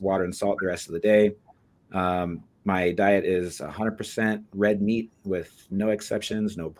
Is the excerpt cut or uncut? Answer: uncut